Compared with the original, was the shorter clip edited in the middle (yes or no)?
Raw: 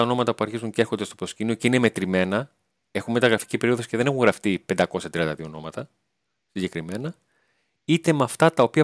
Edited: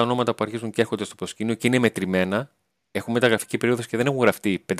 no